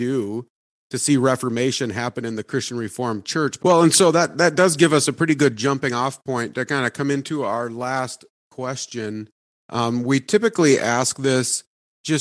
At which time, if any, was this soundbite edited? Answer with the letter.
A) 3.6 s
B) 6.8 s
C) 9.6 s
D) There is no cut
A